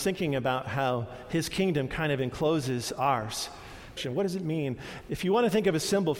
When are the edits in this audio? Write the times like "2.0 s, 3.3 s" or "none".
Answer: 4.0 s, 5.0 s